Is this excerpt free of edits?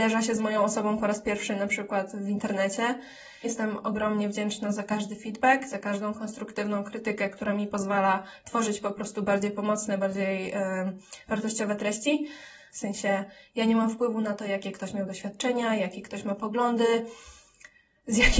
no; 3 cuts; at 3.4 s, 12.7 s, 15.8 s

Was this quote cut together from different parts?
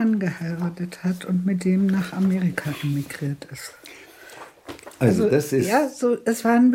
no; 0 cuts

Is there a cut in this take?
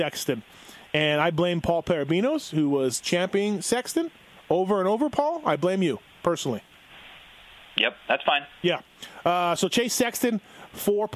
no; 0 cuts

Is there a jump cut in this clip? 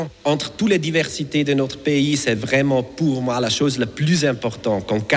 no; 0 cuts

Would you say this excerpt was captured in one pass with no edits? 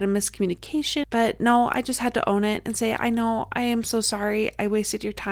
no; 1 cut; at 1.0 s

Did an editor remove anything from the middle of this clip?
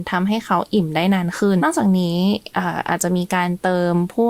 yes; 1 cut; at 1.6 s

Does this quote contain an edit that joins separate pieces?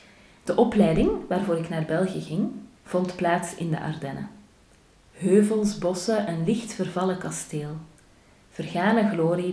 yes; 1 cut; at 2.8 s

